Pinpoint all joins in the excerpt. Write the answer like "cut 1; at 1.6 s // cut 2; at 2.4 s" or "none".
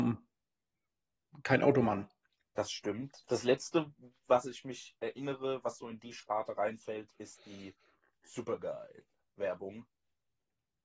none